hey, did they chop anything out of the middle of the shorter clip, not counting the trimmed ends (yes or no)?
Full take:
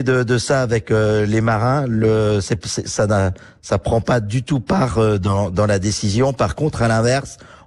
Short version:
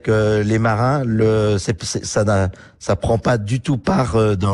no